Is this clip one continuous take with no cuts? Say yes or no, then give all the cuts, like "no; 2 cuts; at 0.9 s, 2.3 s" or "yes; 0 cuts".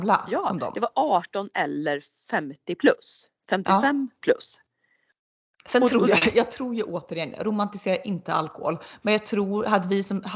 yes; 0 cuts